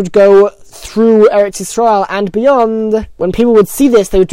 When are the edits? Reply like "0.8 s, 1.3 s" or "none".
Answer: none